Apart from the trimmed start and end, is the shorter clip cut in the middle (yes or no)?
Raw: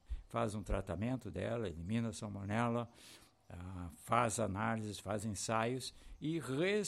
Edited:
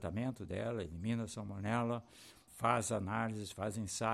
yes